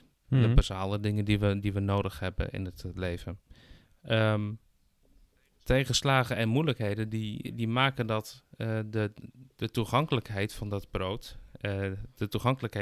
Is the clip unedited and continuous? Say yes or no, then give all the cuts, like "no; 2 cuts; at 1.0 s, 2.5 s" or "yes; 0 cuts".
yes; 0 cuts